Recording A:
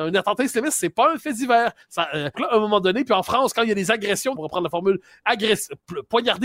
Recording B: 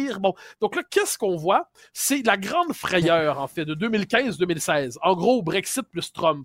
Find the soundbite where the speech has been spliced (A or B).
A